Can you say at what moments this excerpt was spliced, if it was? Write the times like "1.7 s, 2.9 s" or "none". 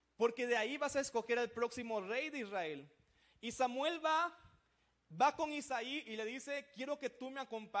none